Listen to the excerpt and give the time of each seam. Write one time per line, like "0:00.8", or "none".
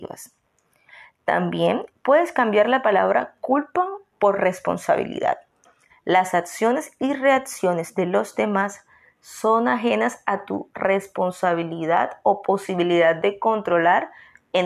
0:05.9